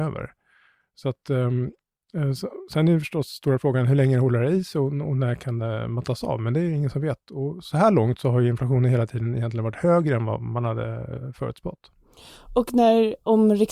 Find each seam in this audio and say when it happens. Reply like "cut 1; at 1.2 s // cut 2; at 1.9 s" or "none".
none